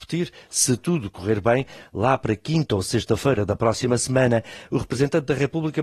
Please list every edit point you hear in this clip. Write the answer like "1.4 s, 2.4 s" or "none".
none

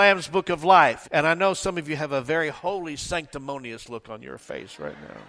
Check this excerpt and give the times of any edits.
1.0 s

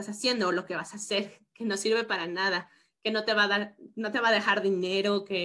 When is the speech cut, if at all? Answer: none

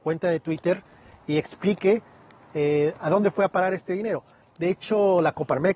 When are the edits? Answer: none

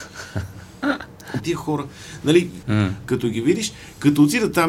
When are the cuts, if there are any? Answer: 1.4 s, 2.6 s

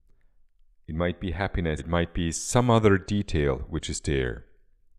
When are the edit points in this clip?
1.8 s

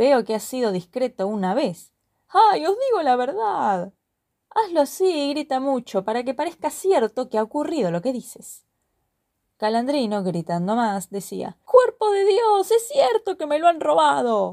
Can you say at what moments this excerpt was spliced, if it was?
none

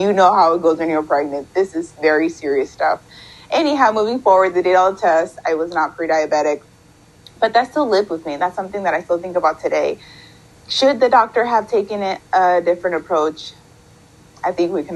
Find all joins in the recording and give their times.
none

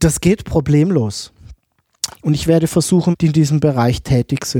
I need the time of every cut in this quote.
2.1 s, 3.1 s

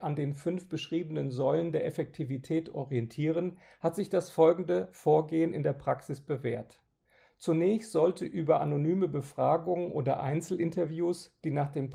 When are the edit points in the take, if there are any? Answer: none

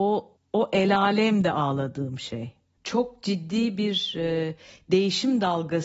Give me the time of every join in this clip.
2.8 s

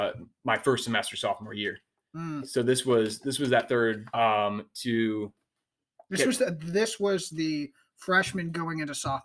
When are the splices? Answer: 4.1 s

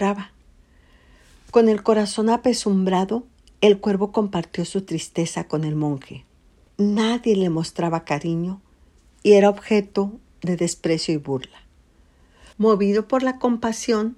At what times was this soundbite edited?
6.7 s, 12.5 s

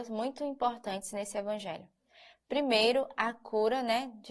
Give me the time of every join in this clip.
none

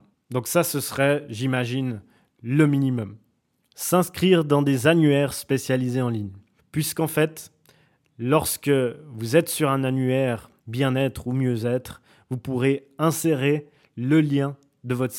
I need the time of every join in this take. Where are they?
6.6 s, 10.6 s

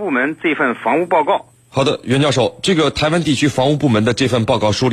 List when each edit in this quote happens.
1.6 s

